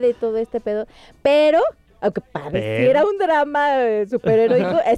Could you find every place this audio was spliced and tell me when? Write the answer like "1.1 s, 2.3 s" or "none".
none